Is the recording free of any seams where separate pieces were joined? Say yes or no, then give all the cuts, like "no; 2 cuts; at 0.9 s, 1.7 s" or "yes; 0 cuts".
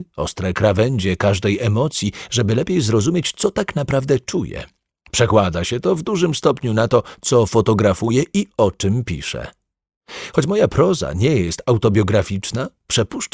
yes; 0 cuts